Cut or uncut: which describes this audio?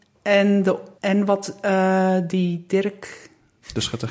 cut